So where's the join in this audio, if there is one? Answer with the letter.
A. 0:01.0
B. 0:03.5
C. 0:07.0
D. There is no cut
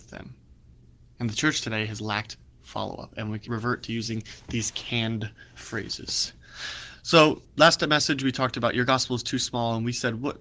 B